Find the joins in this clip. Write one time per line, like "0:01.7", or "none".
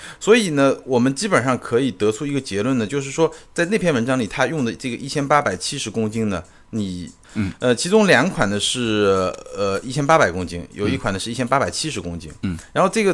0:07.2